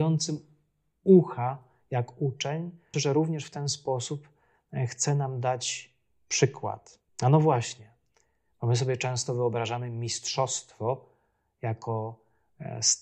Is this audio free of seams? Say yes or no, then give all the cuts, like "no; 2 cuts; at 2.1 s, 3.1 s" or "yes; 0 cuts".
no; 2 cuts; at 2.9 s, 7.1 s